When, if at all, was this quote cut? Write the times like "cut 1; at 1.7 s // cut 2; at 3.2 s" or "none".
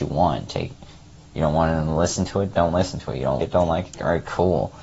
cut 1; at 3.4 s